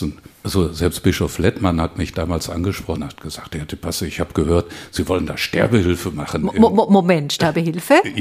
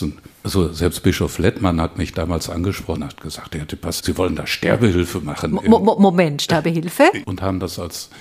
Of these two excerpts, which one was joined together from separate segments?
second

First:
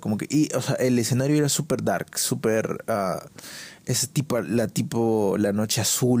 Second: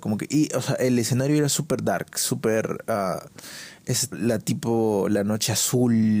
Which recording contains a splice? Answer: second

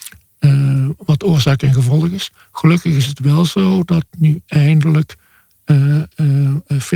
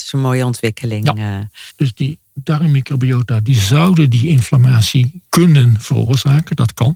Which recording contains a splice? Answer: second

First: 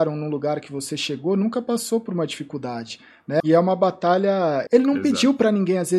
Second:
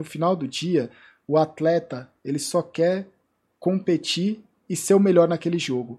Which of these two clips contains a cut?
first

